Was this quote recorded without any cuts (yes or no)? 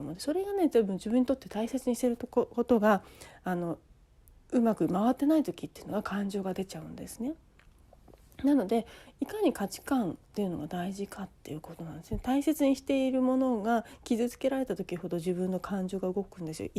yes